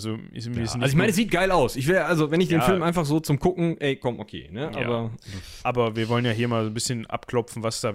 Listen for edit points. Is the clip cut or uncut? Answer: uncut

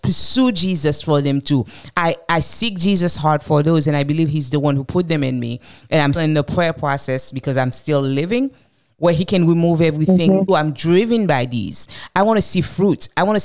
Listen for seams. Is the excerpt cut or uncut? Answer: cut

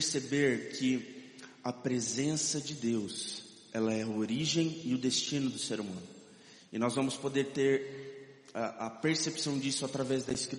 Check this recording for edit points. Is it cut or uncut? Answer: uncut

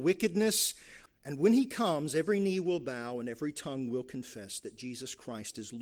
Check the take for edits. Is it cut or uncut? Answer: cut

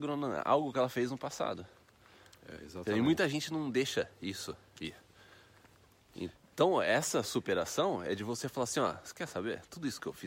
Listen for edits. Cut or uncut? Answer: uncut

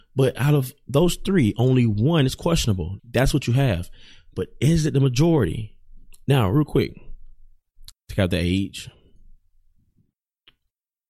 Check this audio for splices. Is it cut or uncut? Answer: cut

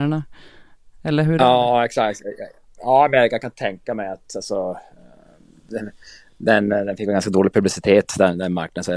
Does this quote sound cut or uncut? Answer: uncut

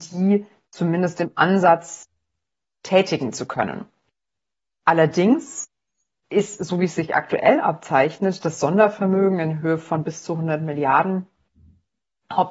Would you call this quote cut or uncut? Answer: uncut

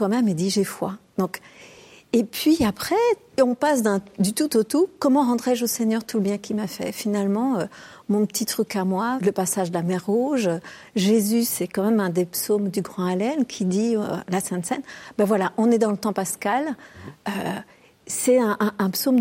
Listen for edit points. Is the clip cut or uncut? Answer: cut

